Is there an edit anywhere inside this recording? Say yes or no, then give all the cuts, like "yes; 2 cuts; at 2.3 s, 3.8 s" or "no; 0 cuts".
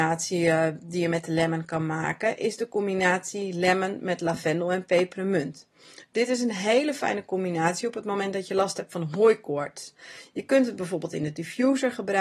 no; 0 cuts